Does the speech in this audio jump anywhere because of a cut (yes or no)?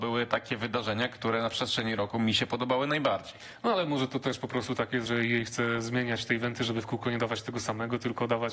no